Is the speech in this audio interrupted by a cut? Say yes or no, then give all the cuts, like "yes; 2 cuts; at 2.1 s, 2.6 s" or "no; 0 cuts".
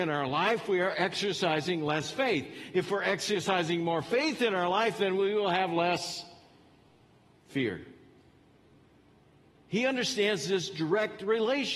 no; 0 cuts